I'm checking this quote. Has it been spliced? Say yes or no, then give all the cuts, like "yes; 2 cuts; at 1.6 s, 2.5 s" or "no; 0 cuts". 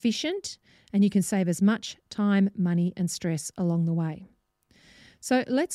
no; 0 cuts